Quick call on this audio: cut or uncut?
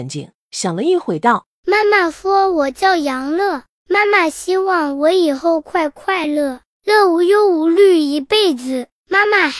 uncut